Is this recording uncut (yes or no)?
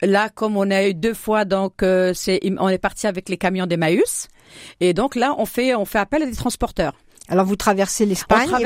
yes